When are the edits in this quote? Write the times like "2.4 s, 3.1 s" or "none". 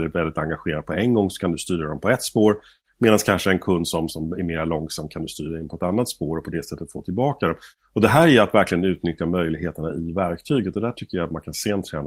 4.1 s